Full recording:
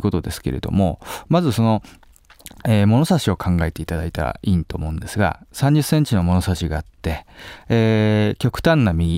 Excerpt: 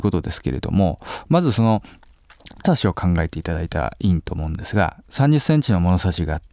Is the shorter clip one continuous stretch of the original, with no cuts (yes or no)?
no